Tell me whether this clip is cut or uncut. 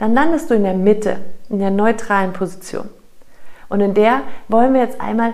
cut